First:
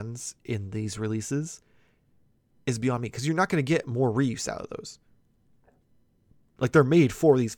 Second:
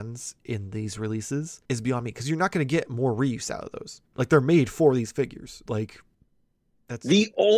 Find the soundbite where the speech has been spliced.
second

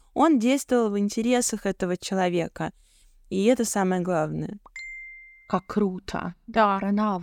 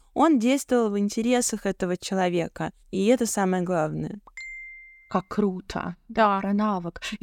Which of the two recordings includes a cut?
second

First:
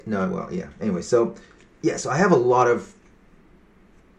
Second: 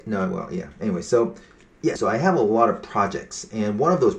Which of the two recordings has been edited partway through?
second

